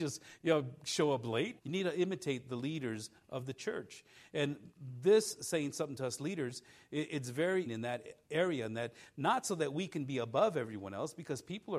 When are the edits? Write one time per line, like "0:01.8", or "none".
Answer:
0:01.6
0:07.7